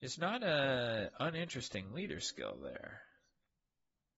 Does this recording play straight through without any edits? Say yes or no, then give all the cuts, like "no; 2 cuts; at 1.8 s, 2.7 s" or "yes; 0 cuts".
yes; 0 cuts